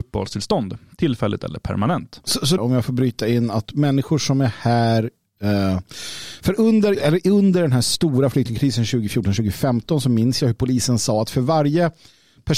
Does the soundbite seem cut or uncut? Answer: cut